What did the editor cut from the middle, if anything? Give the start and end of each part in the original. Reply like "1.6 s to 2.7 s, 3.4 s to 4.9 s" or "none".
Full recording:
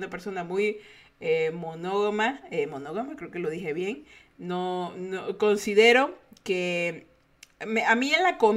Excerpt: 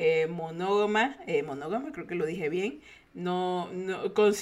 none